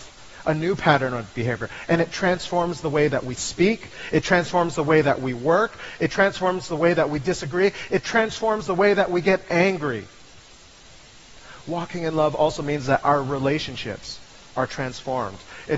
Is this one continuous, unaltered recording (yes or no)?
yes